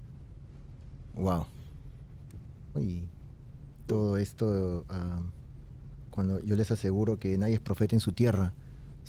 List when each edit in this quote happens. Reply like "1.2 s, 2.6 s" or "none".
2.7 s, 6.1 s